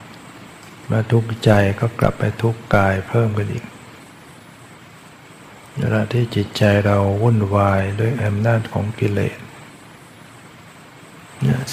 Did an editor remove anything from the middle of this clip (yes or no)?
no